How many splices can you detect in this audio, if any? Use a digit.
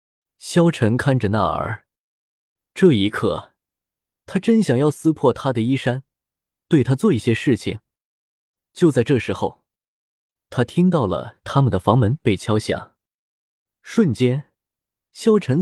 0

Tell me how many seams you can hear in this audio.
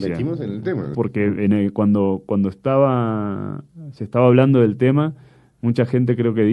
1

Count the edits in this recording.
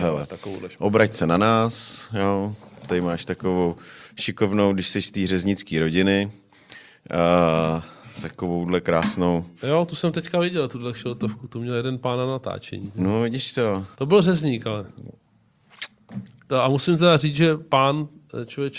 1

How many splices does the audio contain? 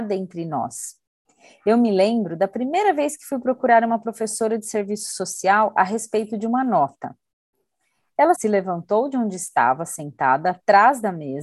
1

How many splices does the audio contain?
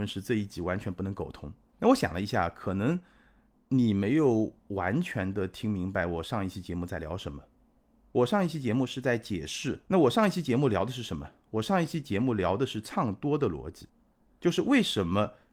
1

